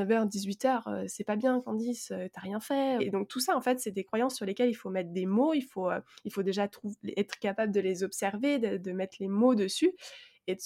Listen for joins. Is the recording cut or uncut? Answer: cut